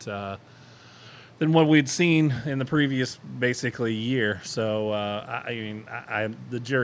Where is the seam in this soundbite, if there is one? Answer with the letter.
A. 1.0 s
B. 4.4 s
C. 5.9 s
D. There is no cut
D